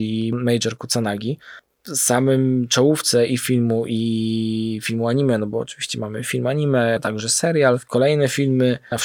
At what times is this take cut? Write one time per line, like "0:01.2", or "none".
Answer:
0:07.0

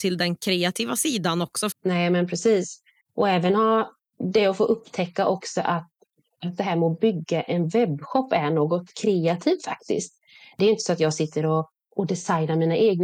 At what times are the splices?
0:01.7

